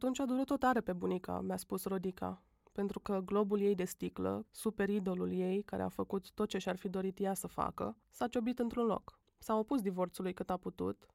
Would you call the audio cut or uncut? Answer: cut